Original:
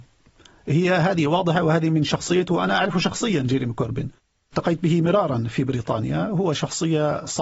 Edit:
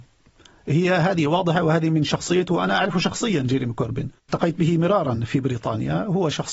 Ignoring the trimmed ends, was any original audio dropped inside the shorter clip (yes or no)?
yes